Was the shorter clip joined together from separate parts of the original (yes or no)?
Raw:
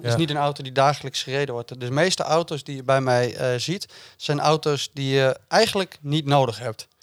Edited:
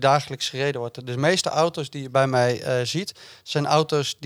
no